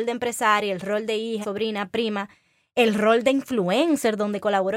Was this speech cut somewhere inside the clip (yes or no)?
yes